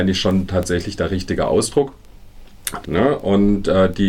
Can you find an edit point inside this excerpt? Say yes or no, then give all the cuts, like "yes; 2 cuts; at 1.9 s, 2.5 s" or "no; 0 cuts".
yes; 1 cut; at 2.8 s